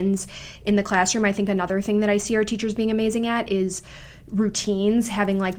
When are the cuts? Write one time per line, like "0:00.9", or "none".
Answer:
none